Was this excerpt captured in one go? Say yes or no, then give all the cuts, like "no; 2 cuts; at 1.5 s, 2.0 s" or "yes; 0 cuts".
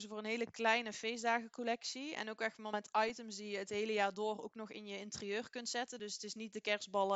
yes; 0 cuts